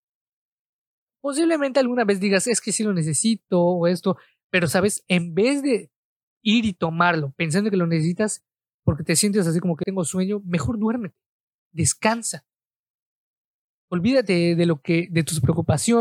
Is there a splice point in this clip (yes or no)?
yes